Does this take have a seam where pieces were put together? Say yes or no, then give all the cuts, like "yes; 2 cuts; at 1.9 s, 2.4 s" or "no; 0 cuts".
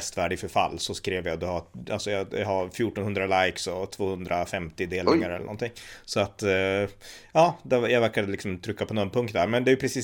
no; 0 cuts